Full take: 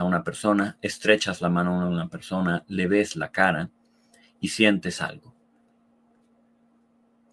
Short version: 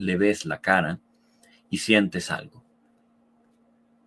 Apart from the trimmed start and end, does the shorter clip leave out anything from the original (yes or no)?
no